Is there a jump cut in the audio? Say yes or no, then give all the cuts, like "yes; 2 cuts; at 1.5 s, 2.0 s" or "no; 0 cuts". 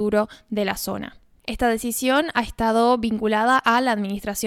yes; 1 cut; at 1.4 s